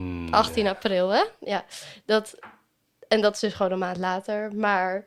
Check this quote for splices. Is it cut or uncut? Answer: uncut